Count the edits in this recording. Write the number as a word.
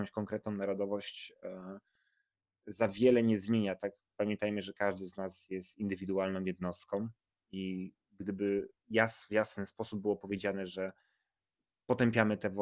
zero